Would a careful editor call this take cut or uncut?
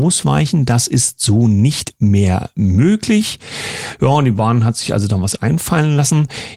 uncut